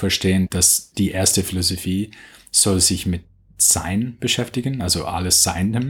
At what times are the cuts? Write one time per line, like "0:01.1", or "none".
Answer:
none